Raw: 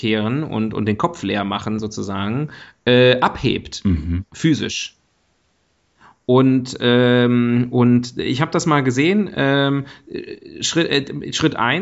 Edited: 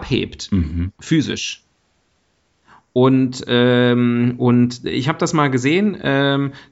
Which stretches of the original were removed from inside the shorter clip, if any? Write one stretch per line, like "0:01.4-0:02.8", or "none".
none